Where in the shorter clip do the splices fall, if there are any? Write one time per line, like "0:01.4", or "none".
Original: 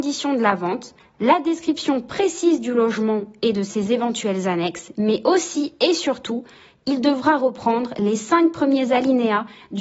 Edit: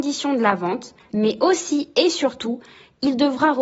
0:01.1